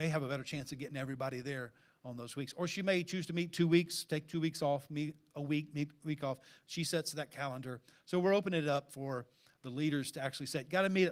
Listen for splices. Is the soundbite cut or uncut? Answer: uncut